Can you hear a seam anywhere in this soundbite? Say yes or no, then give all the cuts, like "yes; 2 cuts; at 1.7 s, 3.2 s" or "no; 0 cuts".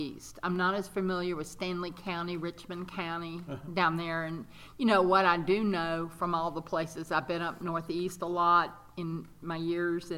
no; 0 cuts